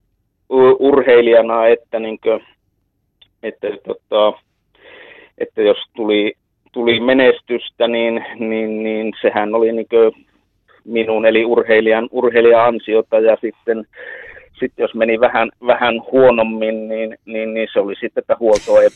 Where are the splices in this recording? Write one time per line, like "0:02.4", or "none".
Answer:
none

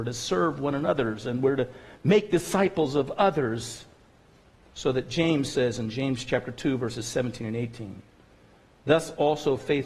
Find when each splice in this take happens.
0:04.6

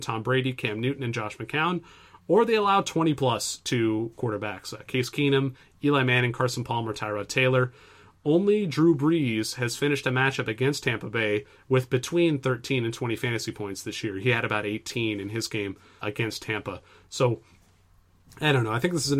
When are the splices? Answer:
0:16.0

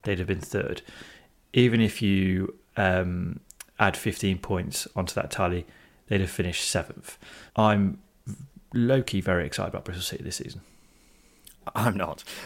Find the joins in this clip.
0:07.5

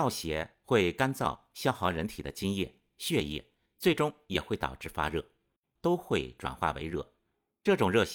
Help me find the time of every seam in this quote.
0:05.7

